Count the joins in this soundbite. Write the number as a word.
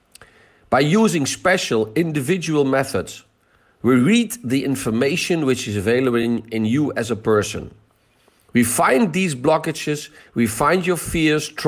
zero